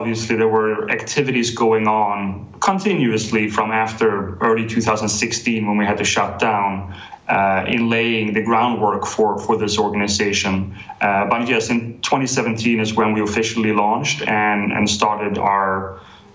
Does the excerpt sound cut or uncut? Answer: uncut